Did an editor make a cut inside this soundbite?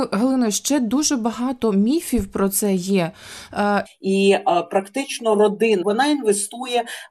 yes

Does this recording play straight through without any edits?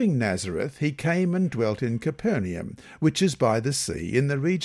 yes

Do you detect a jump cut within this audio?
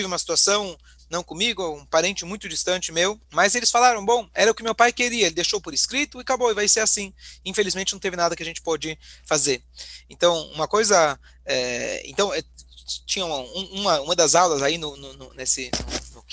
yes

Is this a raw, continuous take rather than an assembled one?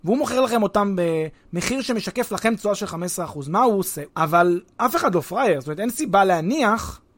no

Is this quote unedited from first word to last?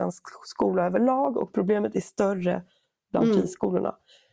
yes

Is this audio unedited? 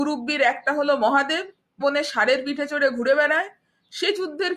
no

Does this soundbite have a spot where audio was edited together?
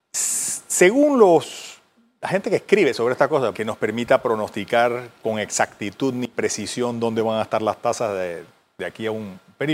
yes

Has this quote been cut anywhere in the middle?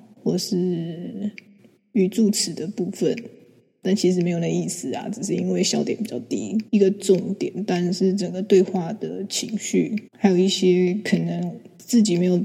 yes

